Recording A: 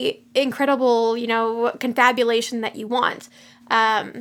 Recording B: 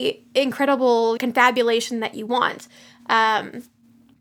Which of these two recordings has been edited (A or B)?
B